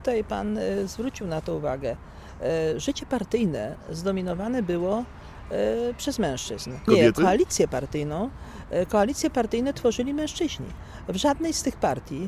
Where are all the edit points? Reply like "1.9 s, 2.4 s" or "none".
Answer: 6.9 s